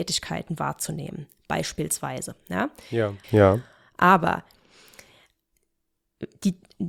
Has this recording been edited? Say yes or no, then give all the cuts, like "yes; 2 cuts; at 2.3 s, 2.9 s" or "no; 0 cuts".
yes; 1 cut; at 3.2 s